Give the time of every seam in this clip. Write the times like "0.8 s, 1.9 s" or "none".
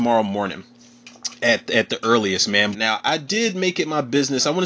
2.7 s

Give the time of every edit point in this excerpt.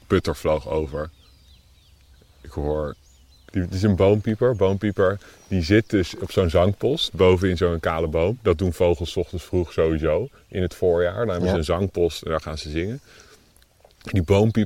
none

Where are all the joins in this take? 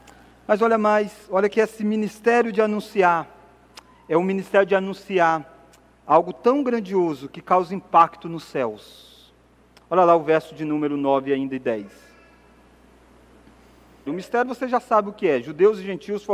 14.1 s

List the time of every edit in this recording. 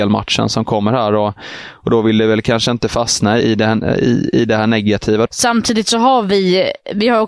3.4 s, 5.3 s

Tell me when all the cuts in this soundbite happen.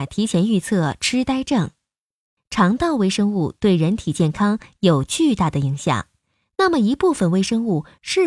2.4 s

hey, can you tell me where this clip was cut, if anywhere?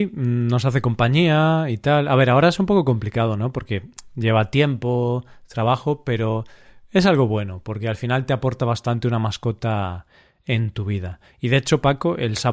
none

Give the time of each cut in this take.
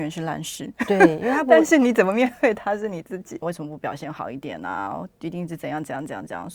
3.4 s

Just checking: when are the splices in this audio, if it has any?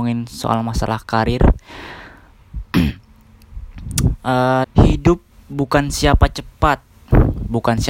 4.6 s

